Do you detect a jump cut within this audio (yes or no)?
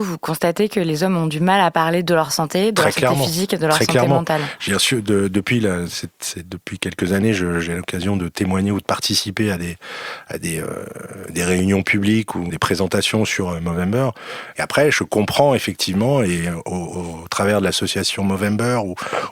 yes